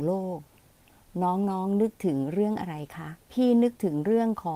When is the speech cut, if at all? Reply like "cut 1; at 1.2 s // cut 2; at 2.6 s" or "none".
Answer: cut 1; at 3.2 s